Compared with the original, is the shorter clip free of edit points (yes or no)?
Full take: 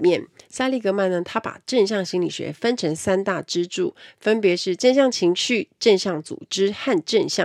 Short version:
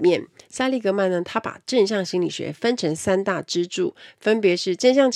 yes